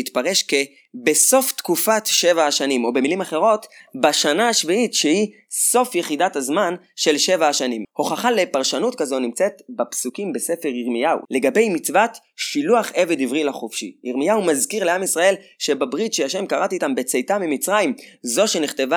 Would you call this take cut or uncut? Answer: cut